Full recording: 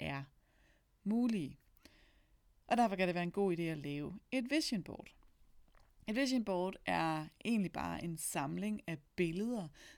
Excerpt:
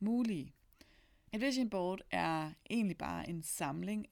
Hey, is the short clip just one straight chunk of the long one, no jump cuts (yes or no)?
no